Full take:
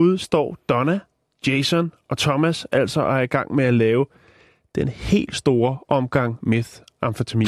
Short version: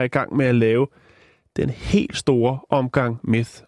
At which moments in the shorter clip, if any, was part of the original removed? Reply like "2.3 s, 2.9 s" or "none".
none